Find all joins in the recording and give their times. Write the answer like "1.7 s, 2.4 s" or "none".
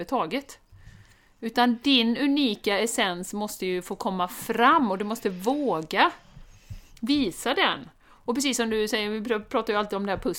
none